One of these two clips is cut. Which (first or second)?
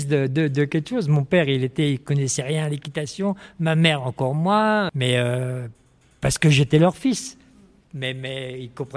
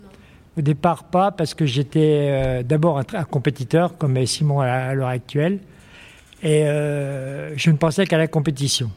first